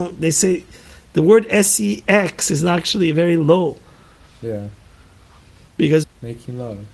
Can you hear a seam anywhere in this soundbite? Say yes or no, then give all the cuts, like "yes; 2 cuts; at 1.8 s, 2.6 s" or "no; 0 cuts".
yes; 1 cut; at 6.0 s